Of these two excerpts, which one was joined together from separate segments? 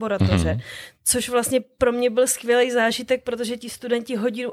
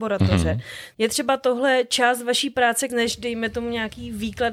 second; 2 cuts; at 0.9 s, 2.9 s

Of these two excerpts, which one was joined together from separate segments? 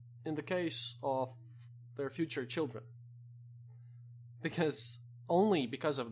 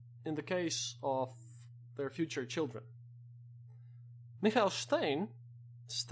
second; 1 cut; at 4.3 s

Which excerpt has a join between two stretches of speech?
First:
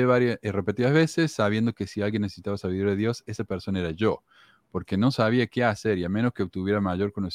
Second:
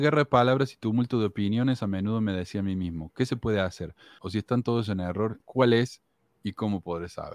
second; 2 cuts; at 4.2 s, 5.4 s

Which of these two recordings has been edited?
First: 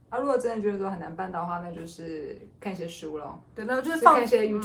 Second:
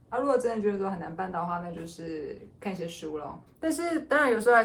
second; 1 cut; at 3.5 s

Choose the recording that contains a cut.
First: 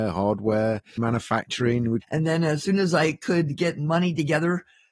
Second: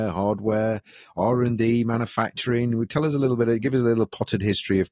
first; 2 cuts; at 1.0 s, 2.0 s

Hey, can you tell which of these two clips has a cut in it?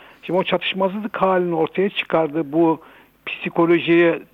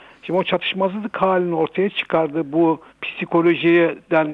second; 1 cut; at 2.9 s

